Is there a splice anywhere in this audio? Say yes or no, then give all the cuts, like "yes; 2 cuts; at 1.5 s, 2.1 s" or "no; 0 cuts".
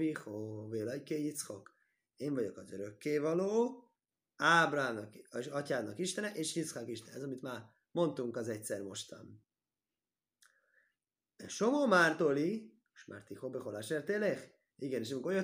no; 0 cuts